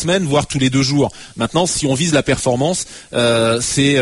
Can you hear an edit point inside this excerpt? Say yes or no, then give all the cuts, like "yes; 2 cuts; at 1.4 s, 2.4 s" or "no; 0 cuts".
no; 0 cuts